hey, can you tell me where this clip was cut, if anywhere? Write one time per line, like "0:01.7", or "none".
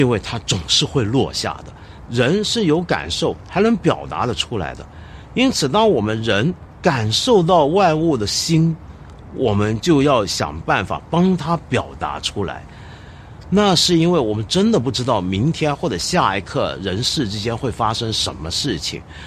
0:02.1
0:13.4